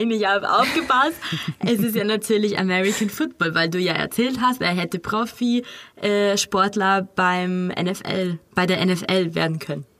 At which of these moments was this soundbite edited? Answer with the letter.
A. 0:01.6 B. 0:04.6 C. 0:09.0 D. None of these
D